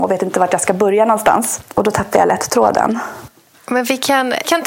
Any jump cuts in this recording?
no; 0 cuts

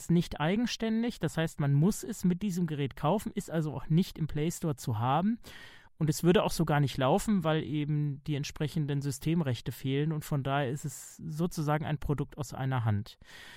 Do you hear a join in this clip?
no; 0 cuts

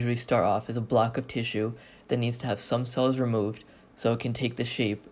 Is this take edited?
no; 0 cuts

